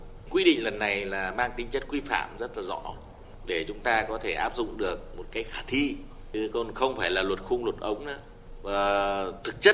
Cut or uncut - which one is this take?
uncut